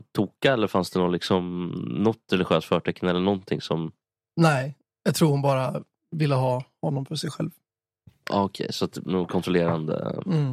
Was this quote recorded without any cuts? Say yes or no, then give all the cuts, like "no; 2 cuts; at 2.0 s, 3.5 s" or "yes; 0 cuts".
yes; 0 cuts